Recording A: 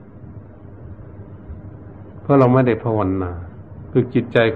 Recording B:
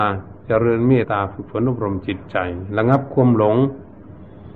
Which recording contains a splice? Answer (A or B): B